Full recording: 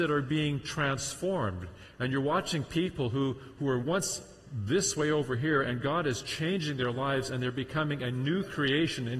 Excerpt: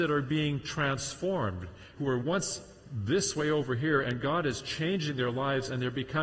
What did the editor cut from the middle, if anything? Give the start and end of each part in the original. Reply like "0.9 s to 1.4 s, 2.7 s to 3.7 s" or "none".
1.9 s to 3.5 s

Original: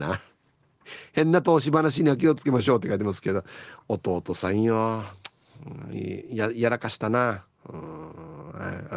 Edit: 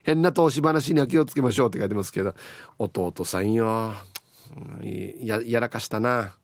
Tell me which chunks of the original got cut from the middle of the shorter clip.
none

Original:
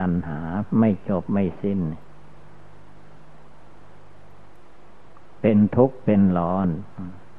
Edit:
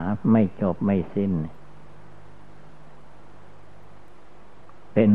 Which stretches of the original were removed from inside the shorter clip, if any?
none

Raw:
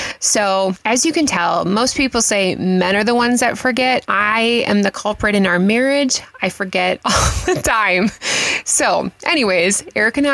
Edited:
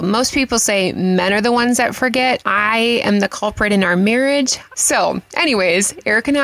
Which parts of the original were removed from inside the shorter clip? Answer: 6.4 s to 8.6 s

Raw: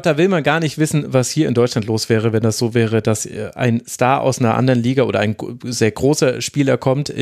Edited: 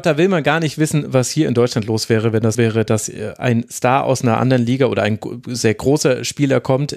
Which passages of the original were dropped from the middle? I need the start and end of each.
2.5 s to 2.7 s

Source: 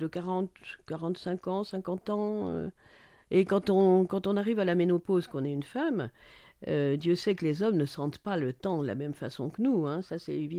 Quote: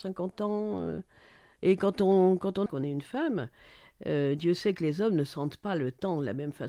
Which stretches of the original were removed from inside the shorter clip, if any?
4.3 s to 5.3 s

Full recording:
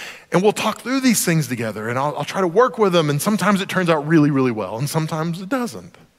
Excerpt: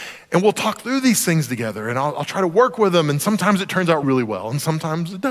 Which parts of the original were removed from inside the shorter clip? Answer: 4.0 s to 4.3 s

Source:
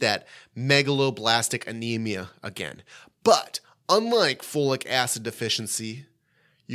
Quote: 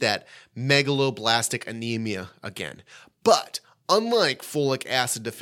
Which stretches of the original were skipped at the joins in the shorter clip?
none

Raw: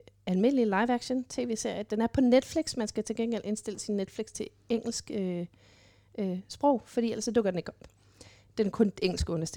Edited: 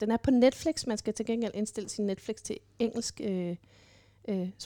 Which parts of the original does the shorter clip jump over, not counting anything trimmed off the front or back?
none

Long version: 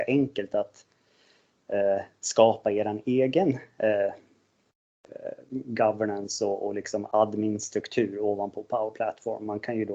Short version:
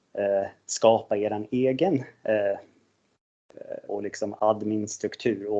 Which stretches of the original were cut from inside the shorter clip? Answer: 5.4 s to 6.6 s

